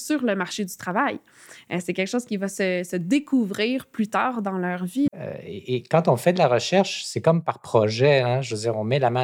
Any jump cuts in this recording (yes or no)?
yes